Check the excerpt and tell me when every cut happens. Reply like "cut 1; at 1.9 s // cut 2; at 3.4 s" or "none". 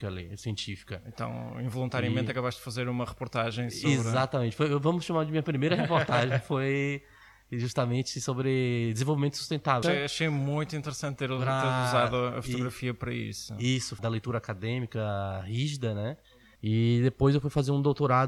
cut 1; at 9.8 s // cut 2; at 14.0 s // cut 3; at 16.6 s